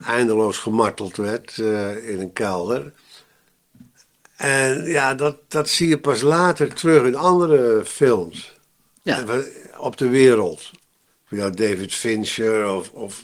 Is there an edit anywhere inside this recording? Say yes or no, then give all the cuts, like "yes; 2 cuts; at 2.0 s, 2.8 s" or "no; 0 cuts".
no; 0 cuts